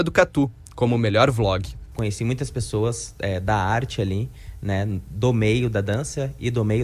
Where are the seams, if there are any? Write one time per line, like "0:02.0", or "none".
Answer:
0:01.9